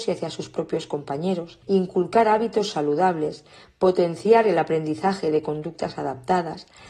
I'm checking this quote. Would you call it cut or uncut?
cut